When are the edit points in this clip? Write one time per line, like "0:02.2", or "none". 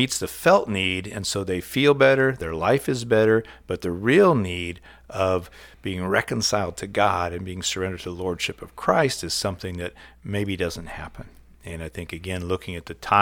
none